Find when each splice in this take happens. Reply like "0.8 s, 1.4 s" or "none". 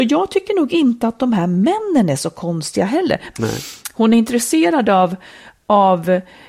3.3 s